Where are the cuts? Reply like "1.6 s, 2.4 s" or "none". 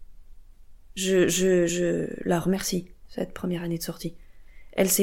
none